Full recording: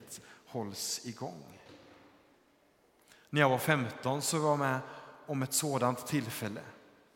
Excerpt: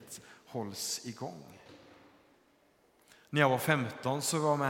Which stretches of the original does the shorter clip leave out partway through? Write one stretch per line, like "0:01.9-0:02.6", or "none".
none